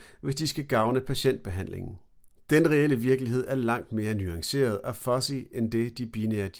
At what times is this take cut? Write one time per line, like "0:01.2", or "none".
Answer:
none